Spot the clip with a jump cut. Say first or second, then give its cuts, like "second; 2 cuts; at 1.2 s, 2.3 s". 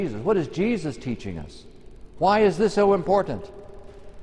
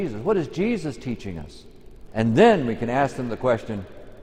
second; 1 cut; at 2.1 s